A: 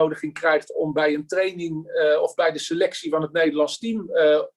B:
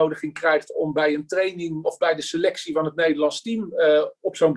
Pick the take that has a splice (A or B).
B